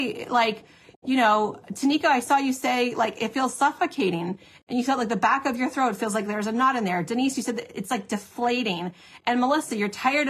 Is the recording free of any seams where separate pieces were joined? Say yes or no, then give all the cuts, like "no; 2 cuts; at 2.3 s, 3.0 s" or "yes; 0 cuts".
yes; 0 cuts